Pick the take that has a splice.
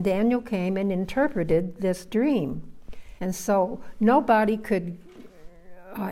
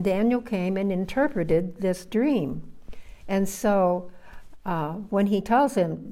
first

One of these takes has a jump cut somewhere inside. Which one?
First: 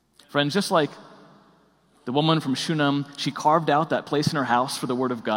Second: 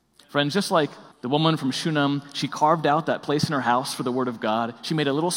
second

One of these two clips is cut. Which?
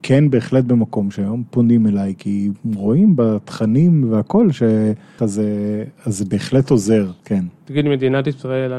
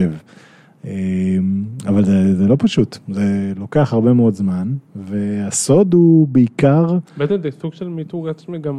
first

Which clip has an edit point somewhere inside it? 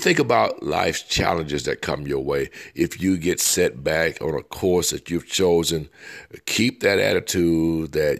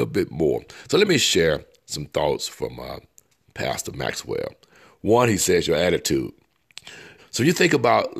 second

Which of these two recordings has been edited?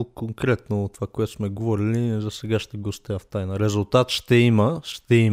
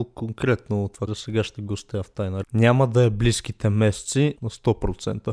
second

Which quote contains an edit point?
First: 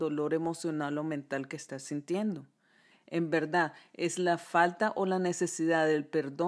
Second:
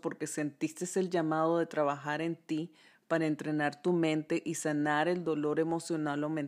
first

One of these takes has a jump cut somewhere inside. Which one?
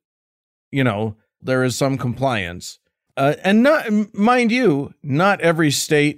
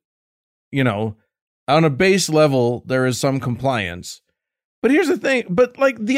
first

